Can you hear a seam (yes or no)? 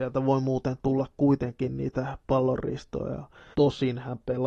yes